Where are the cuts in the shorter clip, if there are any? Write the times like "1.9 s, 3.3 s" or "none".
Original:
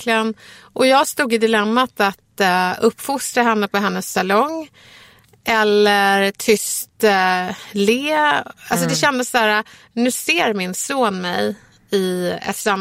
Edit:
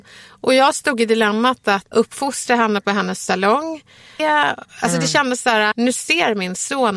1.9 s, 4.2 s, 5.7 s